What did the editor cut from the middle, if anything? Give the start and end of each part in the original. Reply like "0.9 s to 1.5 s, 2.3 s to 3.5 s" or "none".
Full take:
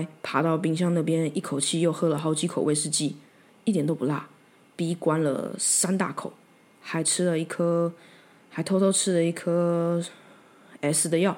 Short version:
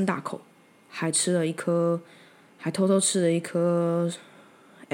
none